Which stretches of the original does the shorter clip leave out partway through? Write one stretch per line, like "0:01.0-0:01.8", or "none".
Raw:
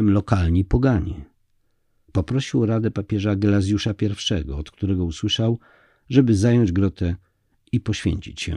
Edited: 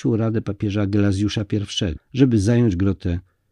0:04.4-0:05.9